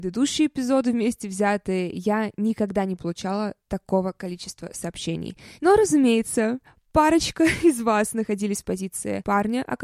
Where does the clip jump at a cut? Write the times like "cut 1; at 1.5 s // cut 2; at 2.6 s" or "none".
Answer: cut 1; at 5.6 s